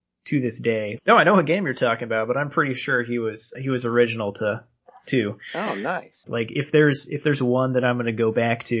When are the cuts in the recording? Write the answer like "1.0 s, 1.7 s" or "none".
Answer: 1.0 s, 3.5 s, 6.3 s